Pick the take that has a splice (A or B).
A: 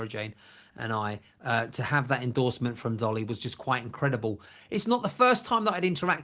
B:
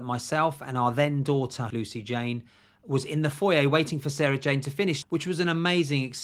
B